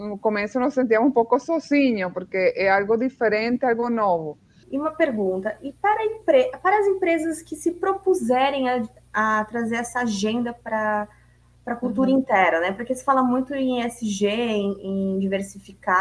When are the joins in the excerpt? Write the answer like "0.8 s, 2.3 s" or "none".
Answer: 4.6 s